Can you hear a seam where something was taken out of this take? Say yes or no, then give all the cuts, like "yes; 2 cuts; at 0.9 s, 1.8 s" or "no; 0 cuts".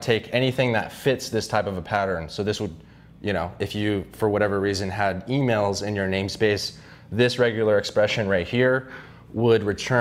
no; 0 cuts